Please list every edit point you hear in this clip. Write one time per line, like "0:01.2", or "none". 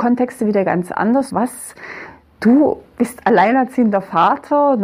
0:01.3